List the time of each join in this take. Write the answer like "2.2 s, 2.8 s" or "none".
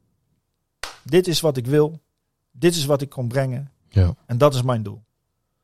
none